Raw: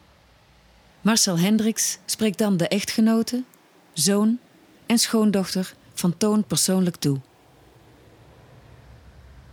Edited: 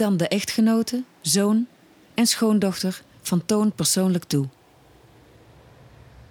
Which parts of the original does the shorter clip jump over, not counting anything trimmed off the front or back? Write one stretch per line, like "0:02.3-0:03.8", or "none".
0:03.5-0:03.8